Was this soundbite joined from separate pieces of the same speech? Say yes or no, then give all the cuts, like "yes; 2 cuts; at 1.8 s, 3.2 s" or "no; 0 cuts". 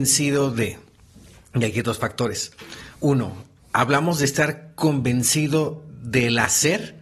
no; 0 cuts